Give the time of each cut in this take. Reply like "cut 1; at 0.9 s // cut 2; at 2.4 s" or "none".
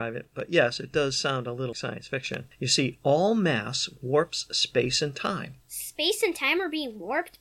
cut 1; at 1.7 s // cut 2; at 5.6 s